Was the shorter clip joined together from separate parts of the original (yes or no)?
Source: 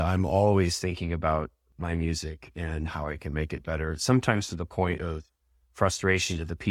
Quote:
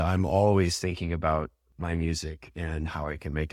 no